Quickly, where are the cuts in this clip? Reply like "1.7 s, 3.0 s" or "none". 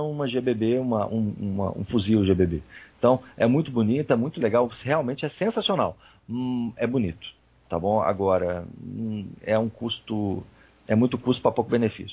none